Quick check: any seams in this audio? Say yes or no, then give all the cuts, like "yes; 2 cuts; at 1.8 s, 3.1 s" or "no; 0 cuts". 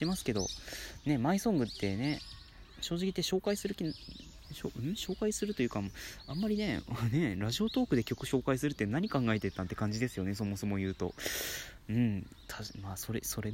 no; 0 cuts